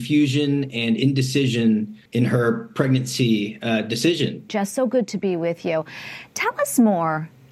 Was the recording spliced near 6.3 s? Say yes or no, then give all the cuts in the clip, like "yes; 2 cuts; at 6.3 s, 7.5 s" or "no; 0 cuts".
no; 2 cuts; at 2.1 s, 4.5 s